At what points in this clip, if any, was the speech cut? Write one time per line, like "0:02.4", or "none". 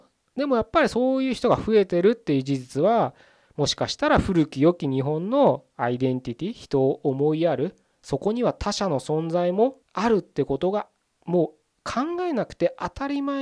0:08.0
0:09.8

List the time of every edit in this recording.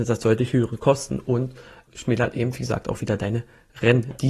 0:01.9

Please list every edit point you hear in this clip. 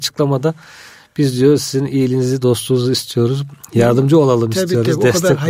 none

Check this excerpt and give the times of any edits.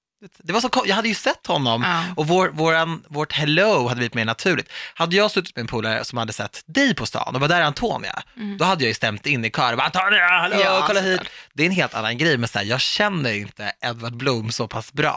none

